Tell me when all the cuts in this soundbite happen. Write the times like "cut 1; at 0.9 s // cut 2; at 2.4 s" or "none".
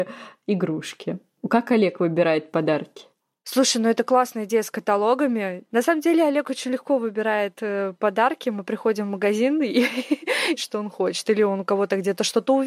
cut 1; at 8.6 s // cut 2; at 10.6 s